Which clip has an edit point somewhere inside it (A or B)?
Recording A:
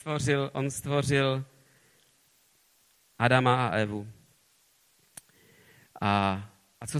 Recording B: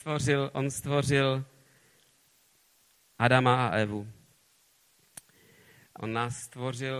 B